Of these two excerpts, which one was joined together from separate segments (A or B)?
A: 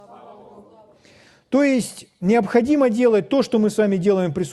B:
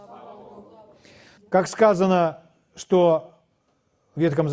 B